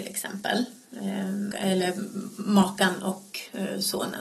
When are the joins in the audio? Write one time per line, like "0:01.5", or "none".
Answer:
0:01.5